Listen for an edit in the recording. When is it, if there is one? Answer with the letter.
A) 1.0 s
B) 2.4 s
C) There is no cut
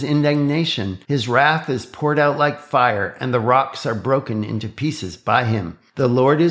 A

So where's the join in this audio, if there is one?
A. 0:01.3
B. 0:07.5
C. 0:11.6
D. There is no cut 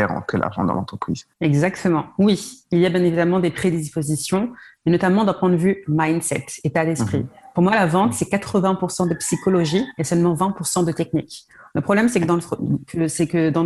A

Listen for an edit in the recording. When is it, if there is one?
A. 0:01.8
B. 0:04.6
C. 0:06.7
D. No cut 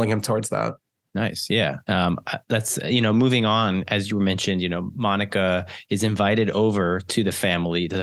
A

